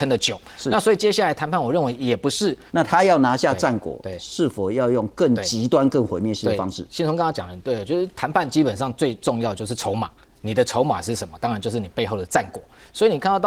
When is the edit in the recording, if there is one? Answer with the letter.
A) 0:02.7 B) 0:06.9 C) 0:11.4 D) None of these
A